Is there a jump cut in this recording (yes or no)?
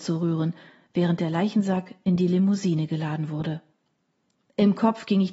no